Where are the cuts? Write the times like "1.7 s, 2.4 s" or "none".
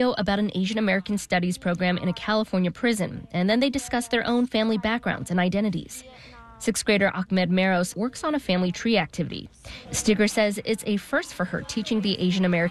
7.9 s, 9.9 s